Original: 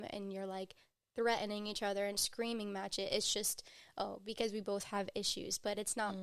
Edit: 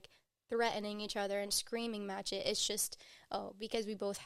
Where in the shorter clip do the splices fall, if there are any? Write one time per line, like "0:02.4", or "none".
none